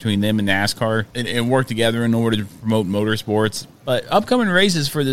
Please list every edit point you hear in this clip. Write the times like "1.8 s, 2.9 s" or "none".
1.1 s, 3.8 s